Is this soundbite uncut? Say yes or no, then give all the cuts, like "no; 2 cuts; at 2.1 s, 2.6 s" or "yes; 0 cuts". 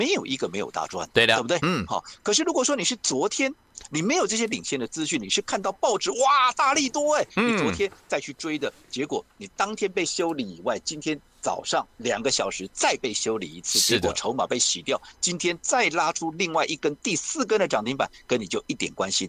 yes; 0 cuts